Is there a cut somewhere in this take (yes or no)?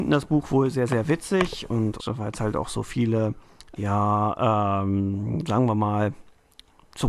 yes